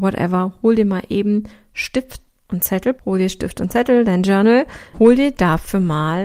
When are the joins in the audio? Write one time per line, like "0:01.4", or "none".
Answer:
0:03.0
0:04.9